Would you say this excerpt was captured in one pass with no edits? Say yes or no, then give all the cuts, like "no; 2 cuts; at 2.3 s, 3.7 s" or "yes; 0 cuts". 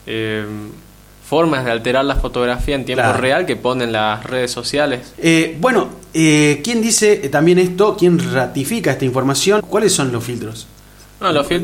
no; 2 cuts; at 5.1 s, 9.6 s